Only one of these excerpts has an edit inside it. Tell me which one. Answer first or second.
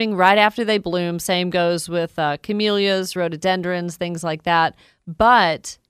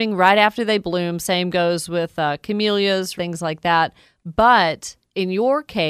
second